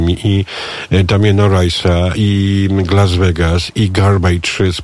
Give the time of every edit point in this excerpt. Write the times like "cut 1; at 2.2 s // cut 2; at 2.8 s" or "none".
none